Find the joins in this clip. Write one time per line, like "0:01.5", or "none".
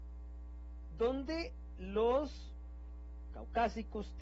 0:03.3

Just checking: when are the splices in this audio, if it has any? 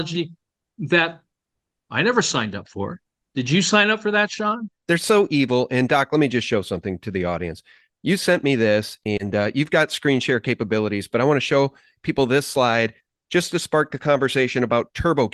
0:04.7

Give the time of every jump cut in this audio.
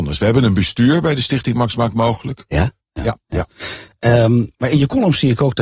0:02.8

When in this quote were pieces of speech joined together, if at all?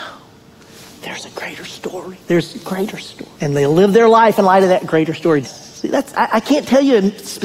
0:03.3
0:05.4

